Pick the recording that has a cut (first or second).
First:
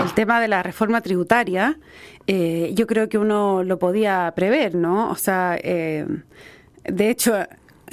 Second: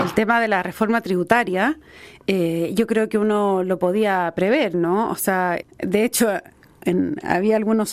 second